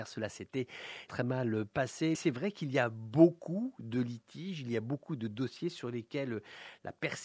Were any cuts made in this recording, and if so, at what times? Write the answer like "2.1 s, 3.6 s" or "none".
1.1 s, 2.1 s